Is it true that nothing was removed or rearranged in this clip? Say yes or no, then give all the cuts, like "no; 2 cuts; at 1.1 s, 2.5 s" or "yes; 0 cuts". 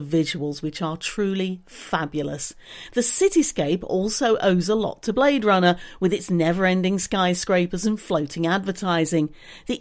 yes; 0 cuts